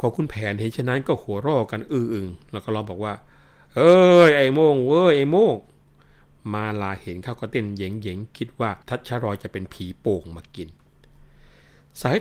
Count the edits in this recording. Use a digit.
1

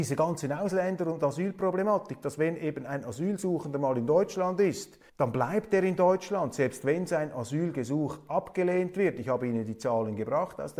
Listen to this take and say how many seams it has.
1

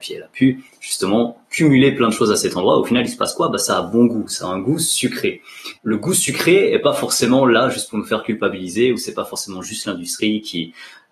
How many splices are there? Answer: 1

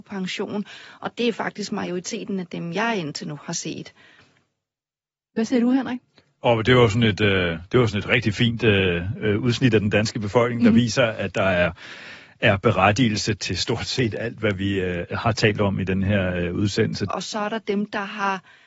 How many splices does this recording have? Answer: 2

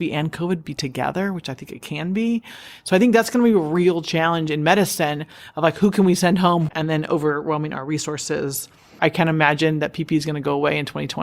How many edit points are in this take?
2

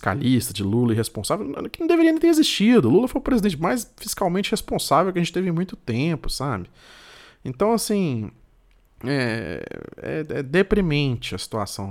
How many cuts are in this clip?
0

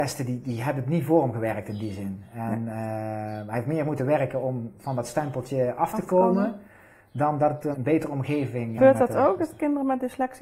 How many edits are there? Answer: 2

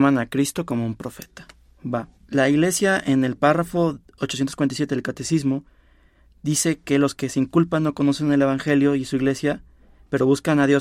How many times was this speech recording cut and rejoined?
1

